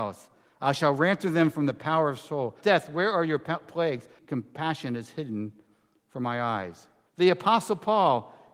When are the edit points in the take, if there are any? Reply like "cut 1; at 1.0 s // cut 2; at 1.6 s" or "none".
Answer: cut 1; at 2.6 s // cut 2; at 4.2 s // cut 3; at 7.1 s